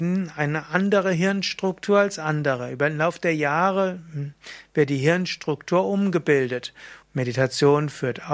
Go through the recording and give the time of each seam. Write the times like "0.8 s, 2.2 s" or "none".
7.0 s